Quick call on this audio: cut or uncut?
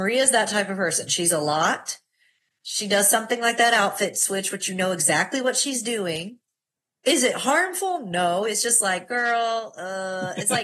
uncut